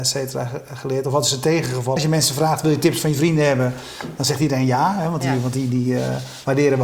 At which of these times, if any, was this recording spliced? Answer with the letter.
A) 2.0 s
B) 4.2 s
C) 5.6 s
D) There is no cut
A